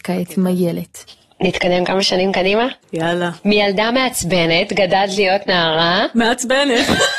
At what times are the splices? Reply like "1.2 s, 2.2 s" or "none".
2.8 s